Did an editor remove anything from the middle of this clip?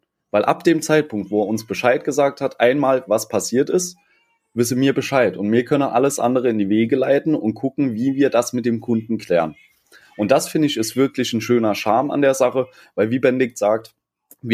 no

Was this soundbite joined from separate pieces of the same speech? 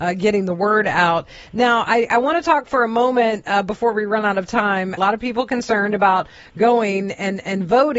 yes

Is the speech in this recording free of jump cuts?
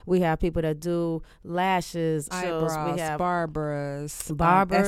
no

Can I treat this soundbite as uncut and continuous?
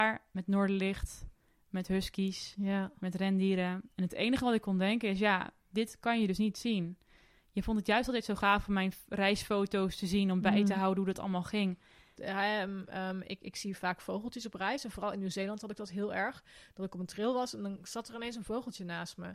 no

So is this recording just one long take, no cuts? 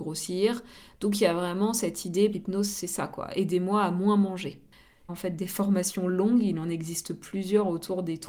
no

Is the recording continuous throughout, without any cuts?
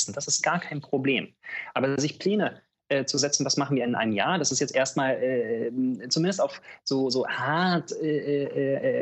yes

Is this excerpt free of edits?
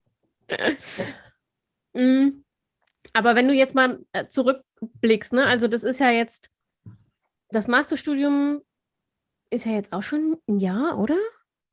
no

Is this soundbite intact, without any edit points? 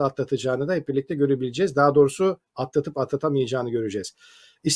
yes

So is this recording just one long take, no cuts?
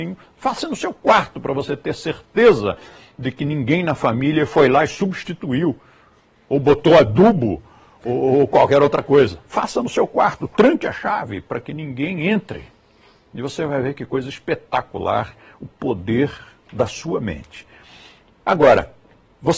yes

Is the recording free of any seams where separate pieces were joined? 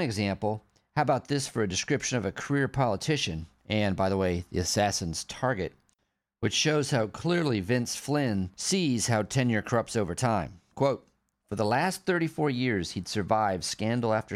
yes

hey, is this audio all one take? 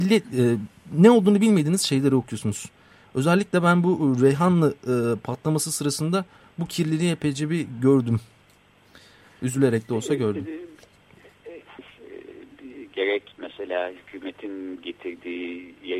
no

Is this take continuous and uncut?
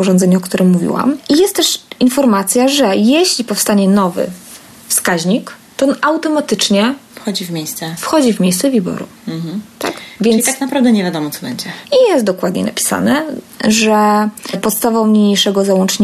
no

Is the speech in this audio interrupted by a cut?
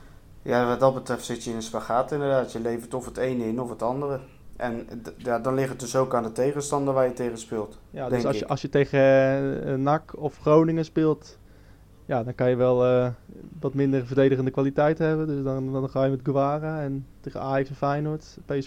no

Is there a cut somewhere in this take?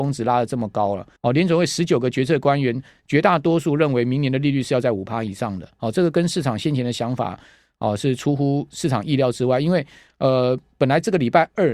yes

